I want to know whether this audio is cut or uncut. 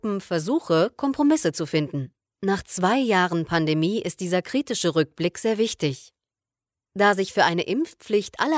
cut